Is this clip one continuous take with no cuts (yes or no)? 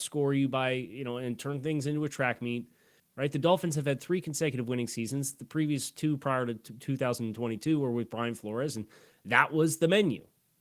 no